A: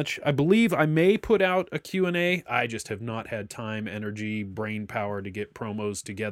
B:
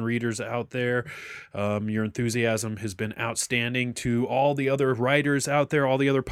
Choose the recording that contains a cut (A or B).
A